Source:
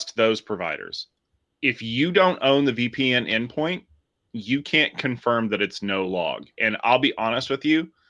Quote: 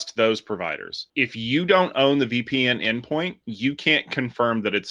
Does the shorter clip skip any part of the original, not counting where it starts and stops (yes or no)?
yes